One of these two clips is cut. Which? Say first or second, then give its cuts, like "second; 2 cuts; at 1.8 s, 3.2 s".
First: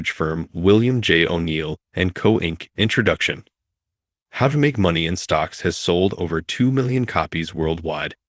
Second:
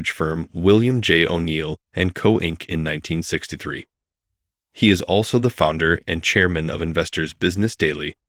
first; 1 cut; at 2.7 s